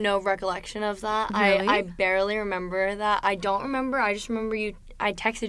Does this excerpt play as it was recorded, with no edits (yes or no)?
yes